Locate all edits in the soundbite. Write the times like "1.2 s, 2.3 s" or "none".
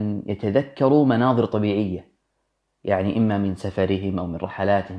none